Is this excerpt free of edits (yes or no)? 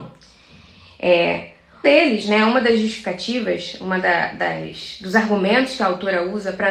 no